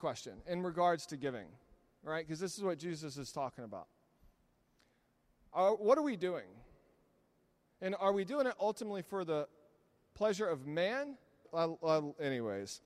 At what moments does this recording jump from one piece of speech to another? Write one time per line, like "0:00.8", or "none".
0:11.4